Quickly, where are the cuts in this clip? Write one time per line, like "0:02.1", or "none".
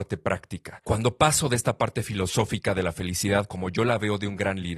0:03.5